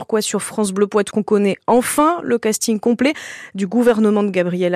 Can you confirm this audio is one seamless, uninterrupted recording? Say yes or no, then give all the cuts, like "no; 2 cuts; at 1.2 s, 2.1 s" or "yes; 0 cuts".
no; 1 cut; at 1.1 s